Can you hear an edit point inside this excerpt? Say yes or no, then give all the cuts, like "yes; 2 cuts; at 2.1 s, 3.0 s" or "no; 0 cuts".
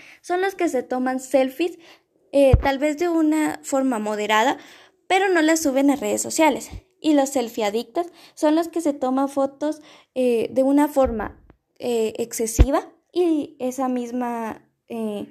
no; 0 cuts